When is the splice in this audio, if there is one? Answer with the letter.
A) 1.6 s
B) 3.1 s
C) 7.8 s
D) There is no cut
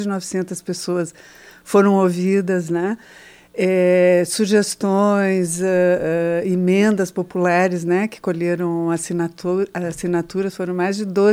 D